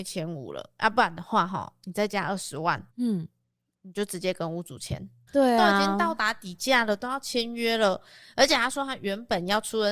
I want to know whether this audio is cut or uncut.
cut